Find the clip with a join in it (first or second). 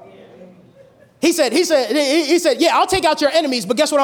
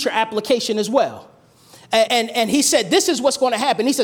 second